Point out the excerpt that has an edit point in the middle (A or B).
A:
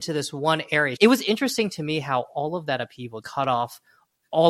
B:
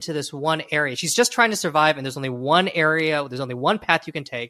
A